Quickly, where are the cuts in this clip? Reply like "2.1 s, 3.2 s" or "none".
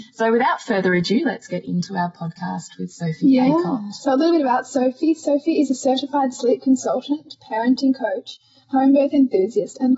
none